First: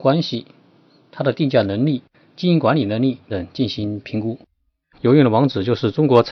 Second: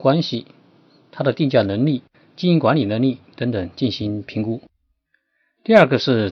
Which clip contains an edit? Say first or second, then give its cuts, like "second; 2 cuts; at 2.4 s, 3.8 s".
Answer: first; 2 cuts; at 3.3 s, 4.9 s